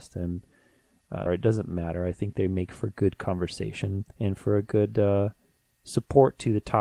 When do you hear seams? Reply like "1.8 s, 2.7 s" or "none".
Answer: 1.3 s, 4.1 s